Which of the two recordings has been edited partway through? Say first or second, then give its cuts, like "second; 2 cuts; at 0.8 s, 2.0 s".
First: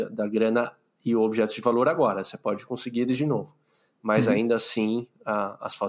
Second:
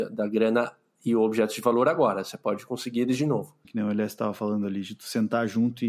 second; 1 cut; at 3.6 s